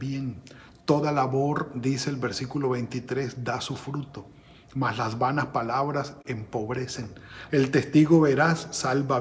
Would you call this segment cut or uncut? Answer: cut